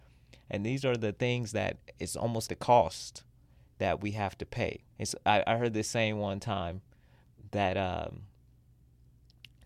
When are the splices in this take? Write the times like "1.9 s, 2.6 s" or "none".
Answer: 2.5 s, 4.9 s